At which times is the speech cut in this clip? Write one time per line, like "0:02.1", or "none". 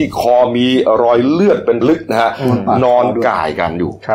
0:01.8